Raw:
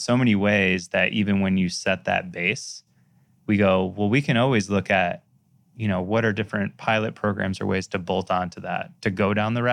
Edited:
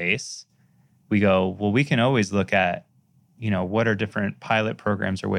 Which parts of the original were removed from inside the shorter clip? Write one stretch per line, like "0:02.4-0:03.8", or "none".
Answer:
none